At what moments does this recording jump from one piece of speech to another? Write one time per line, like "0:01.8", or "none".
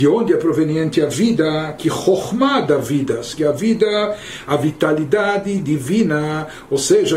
0:03.3